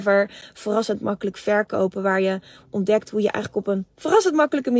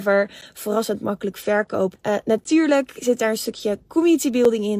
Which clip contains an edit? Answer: second; 1 cut; at 2.0 s

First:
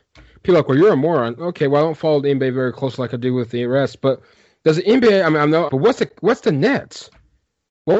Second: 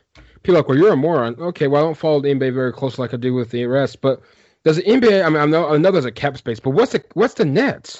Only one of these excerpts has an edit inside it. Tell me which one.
first; 1 cut; at 5.7 s

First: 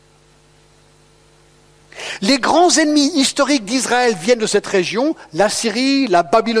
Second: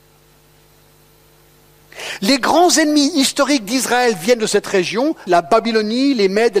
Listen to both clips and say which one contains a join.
second; 1 cut; at 5.3 s

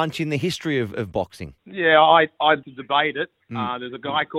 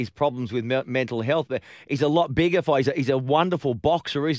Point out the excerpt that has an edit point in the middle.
first; 2 cuts; at 1.6 s, 2.6 s

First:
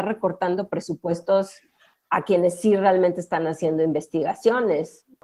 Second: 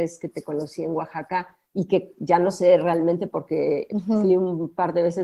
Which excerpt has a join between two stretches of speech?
second; 1 cut; at 1.6 s

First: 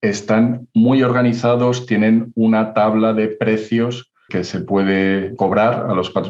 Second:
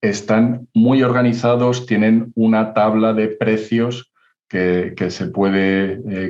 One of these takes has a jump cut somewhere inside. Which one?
first; 2 cuts; at 4.3 s, 5.4 s

